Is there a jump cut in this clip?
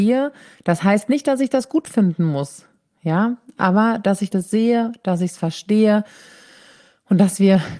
no; 0 cuts

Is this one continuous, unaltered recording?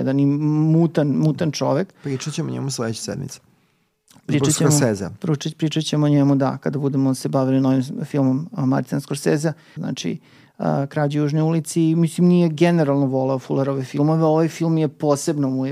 no; 1 cut; at 9.8 s

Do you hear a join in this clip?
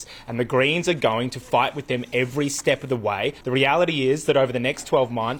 yes; 1 cut; at 3.4 s

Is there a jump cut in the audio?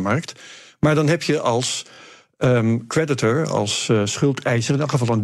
no; 0 cuts

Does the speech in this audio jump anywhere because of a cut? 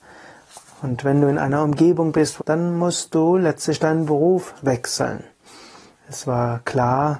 yes; 2 cuts; at 2.4 s, 6.0 s

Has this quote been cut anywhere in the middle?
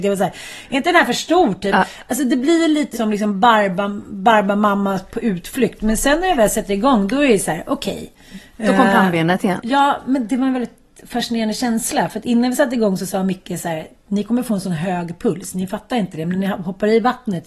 yes; 1 cut; at 2.9 s

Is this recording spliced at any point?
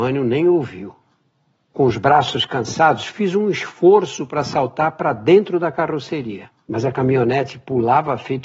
no; 0 cuts

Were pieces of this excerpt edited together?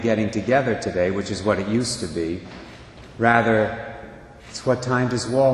no; 0 cuts

